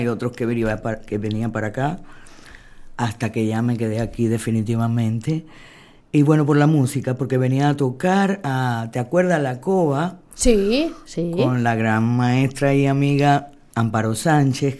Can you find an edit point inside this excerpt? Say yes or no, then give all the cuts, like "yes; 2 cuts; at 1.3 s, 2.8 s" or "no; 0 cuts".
no; 0 cuts